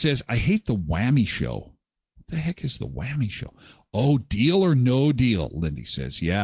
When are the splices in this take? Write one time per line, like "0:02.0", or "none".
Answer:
none